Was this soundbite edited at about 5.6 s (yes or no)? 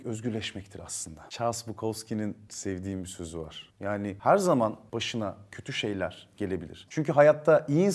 no